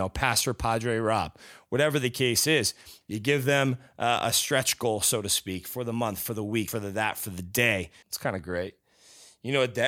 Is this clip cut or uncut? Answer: cut